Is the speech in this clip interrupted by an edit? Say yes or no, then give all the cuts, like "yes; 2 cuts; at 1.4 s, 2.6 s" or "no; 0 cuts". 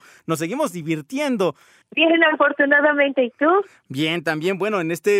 yes; 1 cut; at 1.8 s